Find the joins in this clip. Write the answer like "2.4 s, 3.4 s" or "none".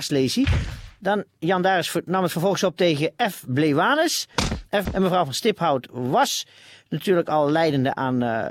4.9 s